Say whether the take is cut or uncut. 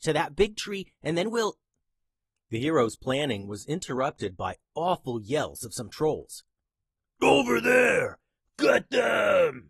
cut